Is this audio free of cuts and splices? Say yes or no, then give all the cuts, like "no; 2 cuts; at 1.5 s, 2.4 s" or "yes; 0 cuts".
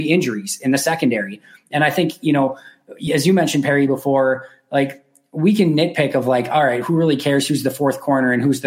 yes; 0 cuts